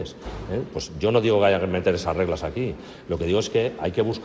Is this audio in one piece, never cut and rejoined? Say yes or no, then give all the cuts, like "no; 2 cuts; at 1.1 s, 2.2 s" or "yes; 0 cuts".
yes; 0 cuts